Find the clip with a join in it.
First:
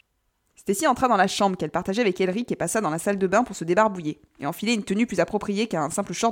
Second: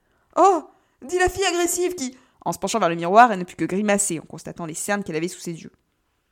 second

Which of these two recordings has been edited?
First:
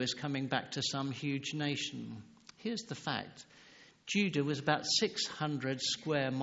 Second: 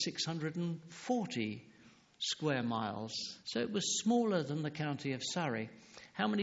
second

